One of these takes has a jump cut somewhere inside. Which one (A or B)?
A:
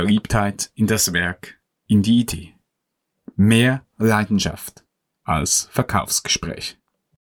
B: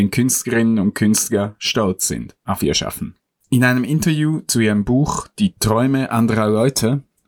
B